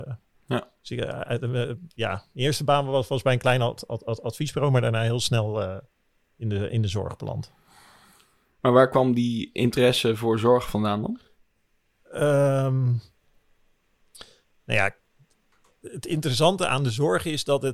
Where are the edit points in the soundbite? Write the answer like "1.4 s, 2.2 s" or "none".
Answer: none